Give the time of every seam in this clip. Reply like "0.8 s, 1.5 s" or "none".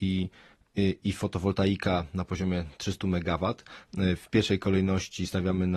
3.9 s